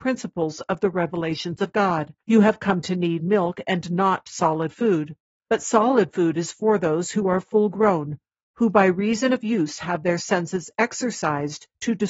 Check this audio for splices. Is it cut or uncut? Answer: cut